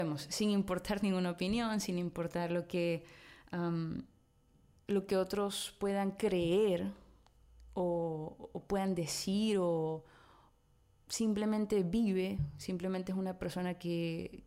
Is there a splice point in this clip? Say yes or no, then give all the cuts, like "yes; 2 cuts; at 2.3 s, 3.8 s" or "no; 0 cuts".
no; 0 cuts